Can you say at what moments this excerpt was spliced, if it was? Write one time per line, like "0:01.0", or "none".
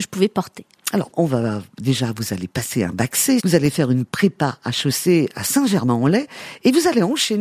0:01.1
0:03.4

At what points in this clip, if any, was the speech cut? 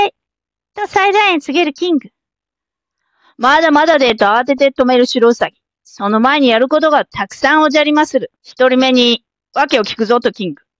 0:08.4

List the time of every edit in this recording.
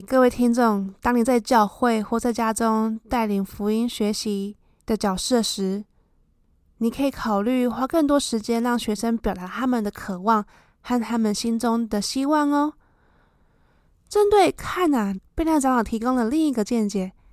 0:15.2

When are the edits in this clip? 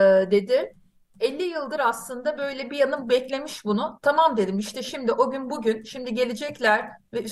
none

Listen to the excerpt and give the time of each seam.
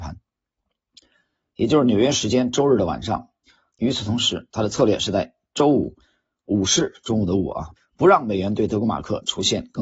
0:03.7
0:07.8

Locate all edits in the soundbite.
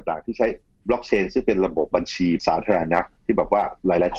0:03.2

